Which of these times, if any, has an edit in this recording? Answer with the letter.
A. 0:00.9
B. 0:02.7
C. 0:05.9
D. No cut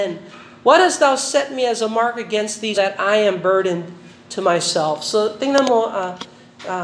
B